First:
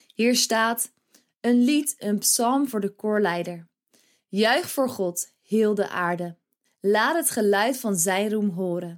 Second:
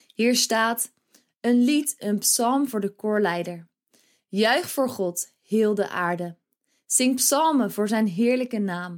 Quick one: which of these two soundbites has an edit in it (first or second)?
first